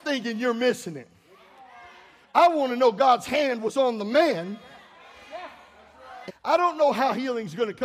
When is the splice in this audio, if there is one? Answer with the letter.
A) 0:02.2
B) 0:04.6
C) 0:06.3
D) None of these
C